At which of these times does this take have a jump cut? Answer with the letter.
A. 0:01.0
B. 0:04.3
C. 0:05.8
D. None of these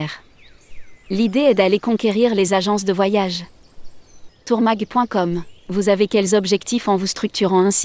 B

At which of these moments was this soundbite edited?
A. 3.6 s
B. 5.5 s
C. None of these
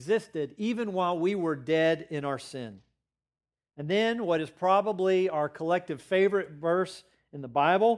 C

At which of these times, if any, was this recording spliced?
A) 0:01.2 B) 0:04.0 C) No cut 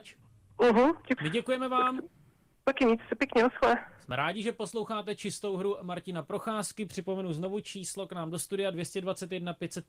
A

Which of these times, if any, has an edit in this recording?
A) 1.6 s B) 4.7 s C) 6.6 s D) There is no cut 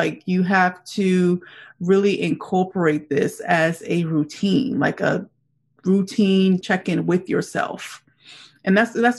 C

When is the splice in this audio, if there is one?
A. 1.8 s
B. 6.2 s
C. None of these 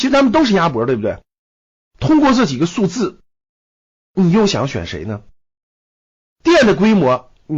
A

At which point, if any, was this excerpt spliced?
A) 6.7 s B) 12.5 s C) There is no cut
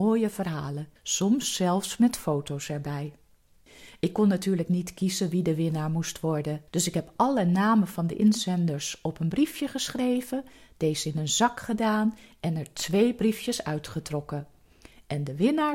A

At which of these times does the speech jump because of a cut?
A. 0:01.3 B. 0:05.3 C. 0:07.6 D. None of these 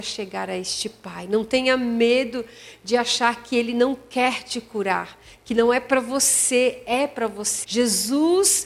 C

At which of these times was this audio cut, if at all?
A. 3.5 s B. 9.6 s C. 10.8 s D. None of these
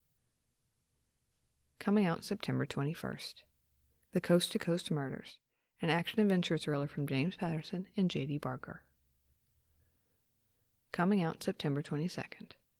D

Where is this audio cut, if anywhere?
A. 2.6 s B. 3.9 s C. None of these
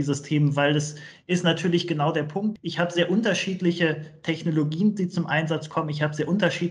C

